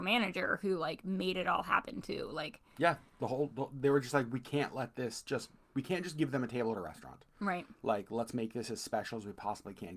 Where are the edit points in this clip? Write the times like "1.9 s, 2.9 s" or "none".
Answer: none